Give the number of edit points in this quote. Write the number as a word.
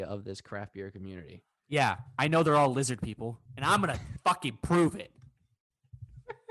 one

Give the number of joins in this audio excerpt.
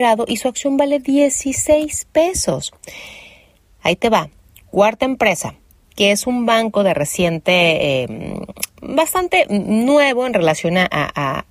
one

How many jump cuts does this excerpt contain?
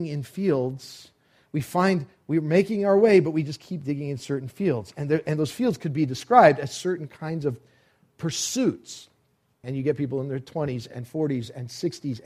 two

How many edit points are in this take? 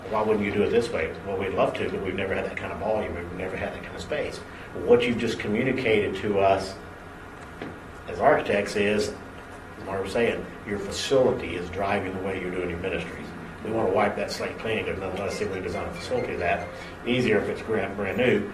one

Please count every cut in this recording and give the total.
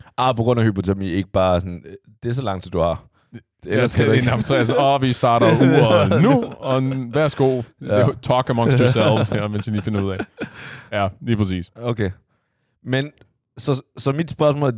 zero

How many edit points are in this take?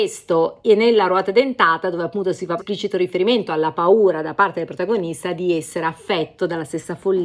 one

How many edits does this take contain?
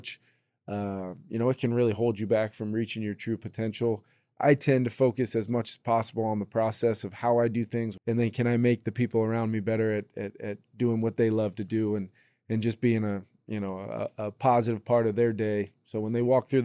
one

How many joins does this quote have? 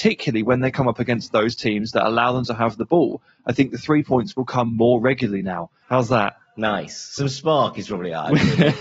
one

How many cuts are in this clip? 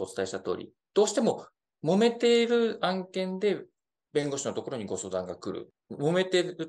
zero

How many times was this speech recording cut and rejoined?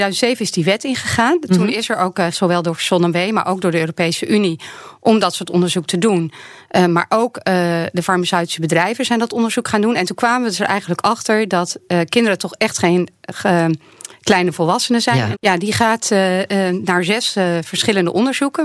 two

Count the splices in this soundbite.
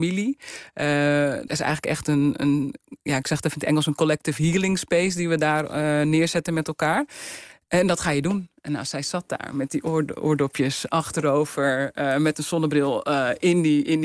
one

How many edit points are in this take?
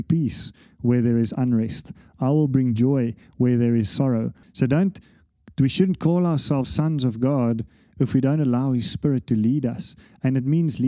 one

